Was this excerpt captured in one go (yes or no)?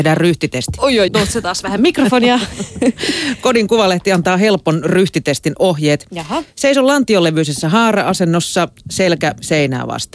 no